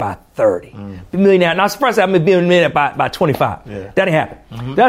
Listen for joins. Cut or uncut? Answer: uncut